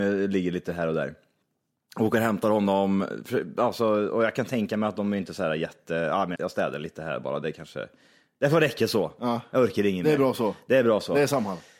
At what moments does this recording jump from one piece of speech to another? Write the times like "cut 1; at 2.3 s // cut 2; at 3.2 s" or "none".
cut 1; at 6.4 s